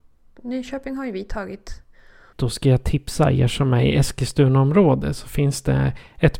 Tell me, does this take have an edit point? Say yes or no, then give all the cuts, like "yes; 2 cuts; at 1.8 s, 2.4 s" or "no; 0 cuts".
yes; 1 cut; at 2.3 s